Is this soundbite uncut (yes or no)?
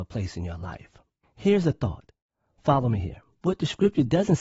no